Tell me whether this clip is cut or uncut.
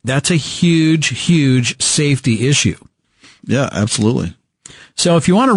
uncut